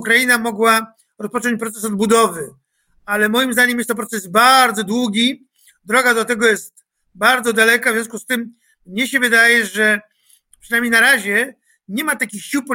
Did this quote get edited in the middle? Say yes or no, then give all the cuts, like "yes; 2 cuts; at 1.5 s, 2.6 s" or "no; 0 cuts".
no; 0 cuts